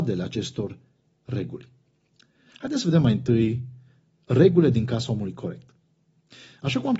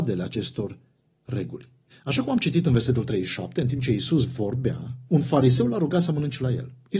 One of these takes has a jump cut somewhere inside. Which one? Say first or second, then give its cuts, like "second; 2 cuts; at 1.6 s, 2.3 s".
second; 2 cuts; at 1.9 s, 5.1 s